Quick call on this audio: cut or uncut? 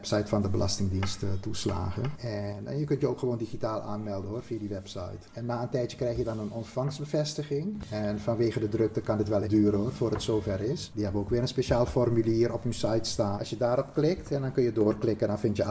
cut